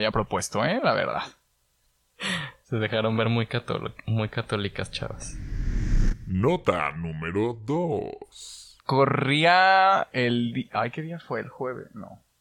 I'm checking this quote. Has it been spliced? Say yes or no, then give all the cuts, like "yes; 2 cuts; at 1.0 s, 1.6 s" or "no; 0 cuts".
yes; 1 cut; at 8.8 s